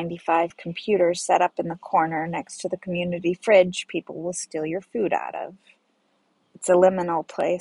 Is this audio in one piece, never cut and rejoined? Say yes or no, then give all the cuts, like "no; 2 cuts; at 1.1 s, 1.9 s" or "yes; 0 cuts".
no; 1 cut; at 6.4 s